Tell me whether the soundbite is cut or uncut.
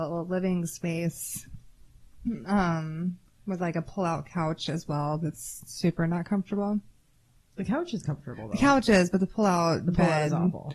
uncut